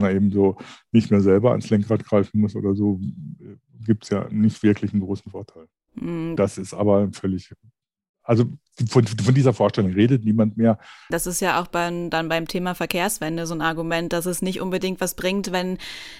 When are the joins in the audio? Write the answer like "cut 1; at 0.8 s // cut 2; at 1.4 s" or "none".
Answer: cut 1; at 6.4 s // cut 2; at 11.1 s